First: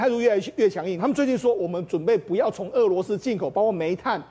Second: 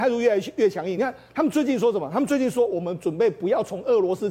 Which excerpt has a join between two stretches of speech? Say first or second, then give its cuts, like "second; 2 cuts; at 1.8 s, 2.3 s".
first; 1 cut; at 1.0 s